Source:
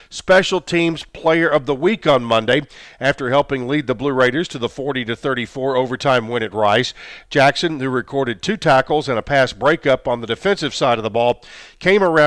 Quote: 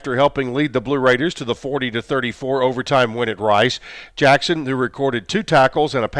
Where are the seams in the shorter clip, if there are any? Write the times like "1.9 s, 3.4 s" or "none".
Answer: none